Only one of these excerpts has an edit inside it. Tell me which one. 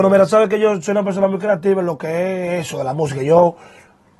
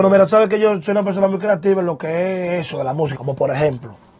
second; 1 cut; at 3.1 s

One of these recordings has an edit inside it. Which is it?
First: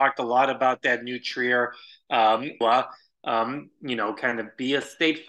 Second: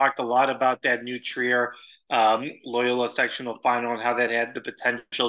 first; 1 cut; at 2.6 s

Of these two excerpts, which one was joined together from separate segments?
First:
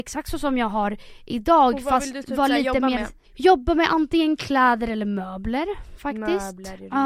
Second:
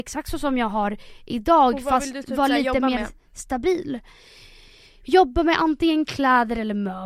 first; 1 cut; at 3.2 s

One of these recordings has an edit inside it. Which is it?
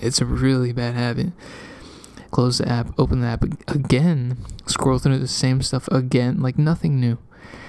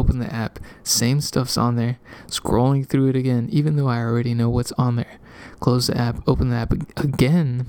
first; 1 cut; at 2.3 s

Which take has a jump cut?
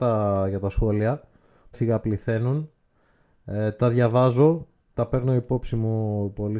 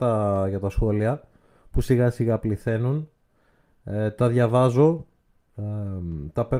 first; 2 cuts; at 1.7 s, 4.9 s

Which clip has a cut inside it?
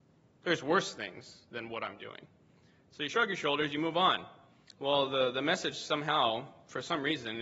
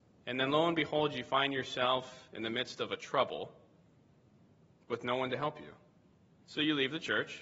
second; 1 cut; at 6.4 s

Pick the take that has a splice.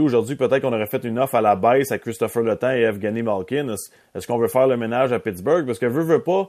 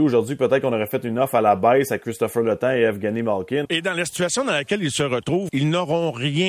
second; 2 cuts; at 3.6 s, 5.5 s

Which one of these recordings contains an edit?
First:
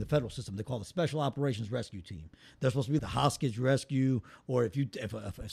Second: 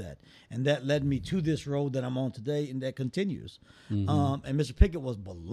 first; 1 cut; at 3.0 s

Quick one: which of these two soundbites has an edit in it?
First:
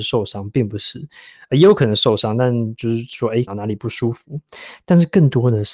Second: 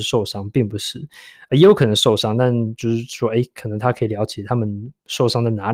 first; 1 cut; at 3.5 s

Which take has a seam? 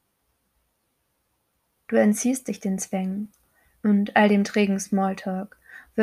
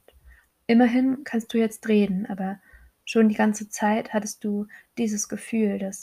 first; 1 cut; at 1.8 s

